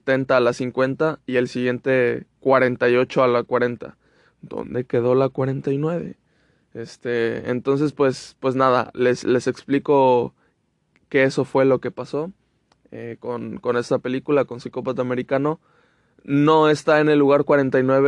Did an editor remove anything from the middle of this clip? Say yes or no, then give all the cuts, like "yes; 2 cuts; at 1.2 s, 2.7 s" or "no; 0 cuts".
no; 0 cuts